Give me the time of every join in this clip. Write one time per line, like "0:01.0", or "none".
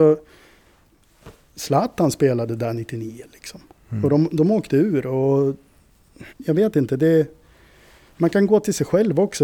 0:04.3
0:06.3